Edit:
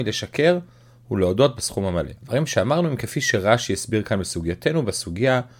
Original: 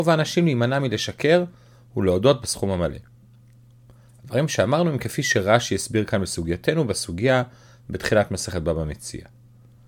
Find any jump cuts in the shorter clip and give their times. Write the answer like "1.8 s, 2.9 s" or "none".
2.2 s